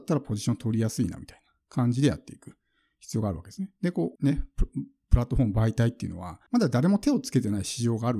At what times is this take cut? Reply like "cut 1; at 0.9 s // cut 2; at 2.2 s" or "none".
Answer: cut 1; at 4.2 s // cut 2; at 6.5 s